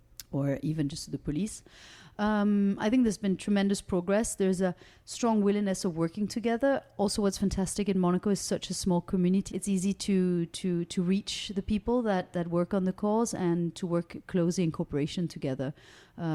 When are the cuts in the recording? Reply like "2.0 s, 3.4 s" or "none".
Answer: 9.5 s, 12.3 s